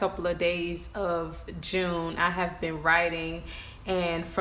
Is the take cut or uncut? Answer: uncut